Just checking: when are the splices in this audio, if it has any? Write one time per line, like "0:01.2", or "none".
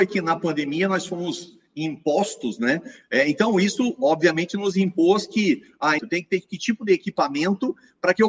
0:03.0
0:06.0